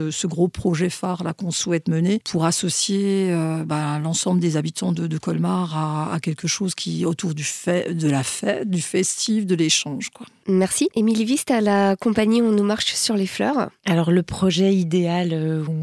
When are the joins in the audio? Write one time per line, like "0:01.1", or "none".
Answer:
none

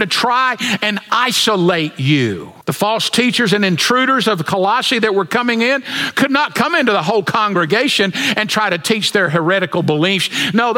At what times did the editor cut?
0:02.6

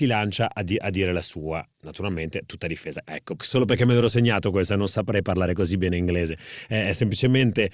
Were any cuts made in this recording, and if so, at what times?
0:03.0

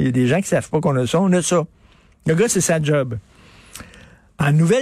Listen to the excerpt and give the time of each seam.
none

